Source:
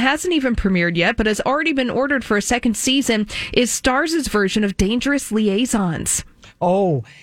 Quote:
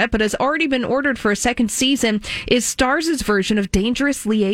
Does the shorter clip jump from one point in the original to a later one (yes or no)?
no